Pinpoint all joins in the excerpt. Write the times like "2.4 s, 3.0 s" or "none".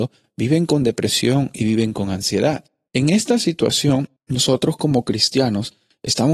2.9 s, 4.2 s